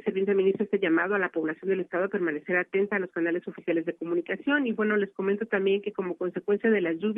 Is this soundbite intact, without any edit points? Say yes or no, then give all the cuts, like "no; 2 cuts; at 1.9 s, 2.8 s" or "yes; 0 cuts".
yes; 0 cuts